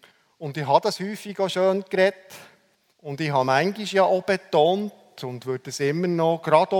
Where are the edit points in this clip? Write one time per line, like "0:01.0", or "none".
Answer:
0:02.9